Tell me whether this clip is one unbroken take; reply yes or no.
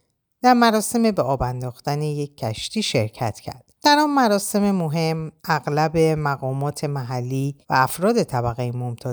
no